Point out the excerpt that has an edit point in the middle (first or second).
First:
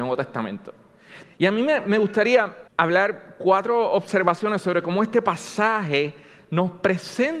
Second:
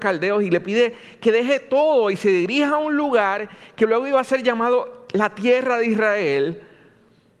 first